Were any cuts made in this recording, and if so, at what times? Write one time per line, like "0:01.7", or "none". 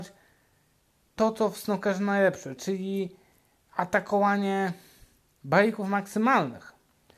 0:02.6